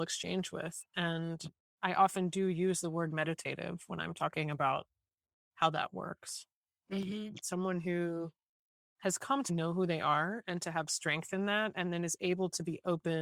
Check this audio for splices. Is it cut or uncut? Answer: cut